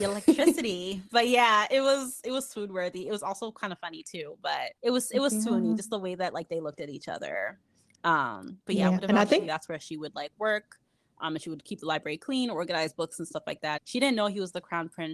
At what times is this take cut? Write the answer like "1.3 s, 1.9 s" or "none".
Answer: 4.8 s, 9.5 s, 13.8 s